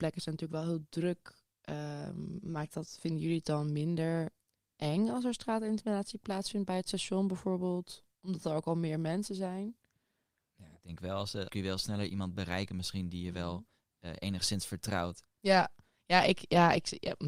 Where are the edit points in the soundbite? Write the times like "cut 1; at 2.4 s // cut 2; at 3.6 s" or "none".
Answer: cut 1; at 11.5 s // cut 2; at 15.2 s